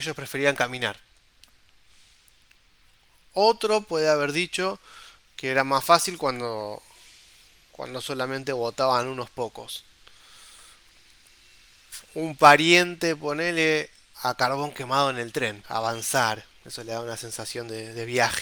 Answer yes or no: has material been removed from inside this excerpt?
yes